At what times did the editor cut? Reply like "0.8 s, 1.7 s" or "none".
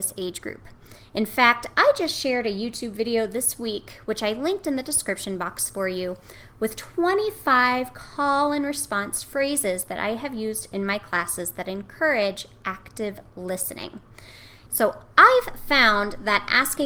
14.7 s